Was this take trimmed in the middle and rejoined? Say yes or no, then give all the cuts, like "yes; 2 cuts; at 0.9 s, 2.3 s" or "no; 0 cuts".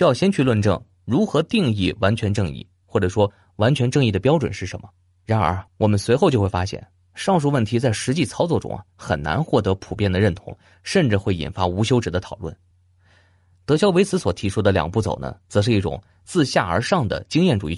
no; 0 cuts